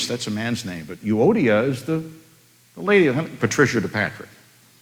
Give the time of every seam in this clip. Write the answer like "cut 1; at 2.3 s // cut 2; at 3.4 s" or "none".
cut 1; at 3.4 s